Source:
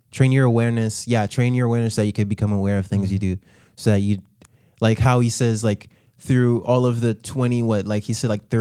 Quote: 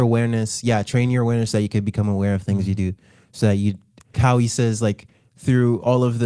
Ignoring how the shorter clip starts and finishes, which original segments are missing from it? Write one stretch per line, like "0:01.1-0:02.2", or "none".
0:04.6-0:05.0